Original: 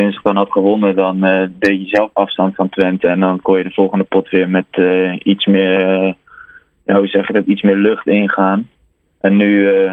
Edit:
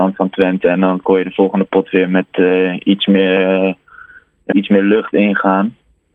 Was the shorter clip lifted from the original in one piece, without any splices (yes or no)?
no